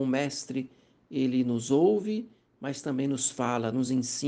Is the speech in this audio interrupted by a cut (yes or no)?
no